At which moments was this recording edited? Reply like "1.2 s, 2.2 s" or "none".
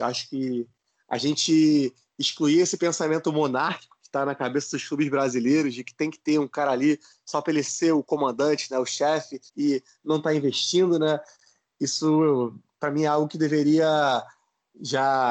9.5 s